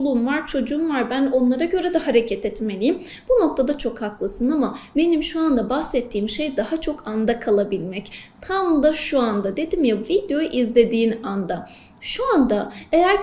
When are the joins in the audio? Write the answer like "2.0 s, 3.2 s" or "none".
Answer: none